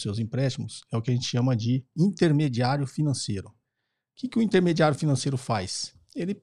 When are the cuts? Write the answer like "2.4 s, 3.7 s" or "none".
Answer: none